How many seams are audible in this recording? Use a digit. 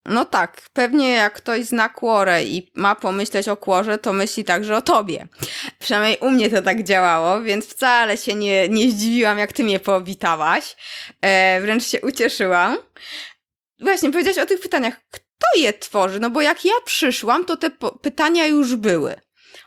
0